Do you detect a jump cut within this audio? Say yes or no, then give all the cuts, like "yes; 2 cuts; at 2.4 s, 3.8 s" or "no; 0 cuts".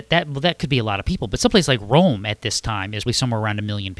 yes; 1 cut; at 3.1 s